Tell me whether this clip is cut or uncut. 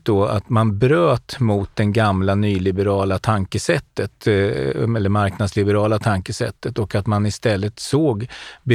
uncut